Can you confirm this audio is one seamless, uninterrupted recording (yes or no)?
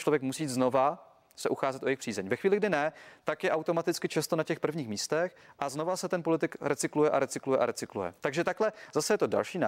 no